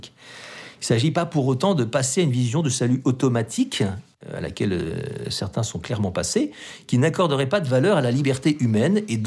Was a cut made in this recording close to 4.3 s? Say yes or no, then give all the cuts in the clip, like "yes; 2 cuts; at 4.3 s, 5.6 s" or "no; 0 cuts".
no; 0 cuts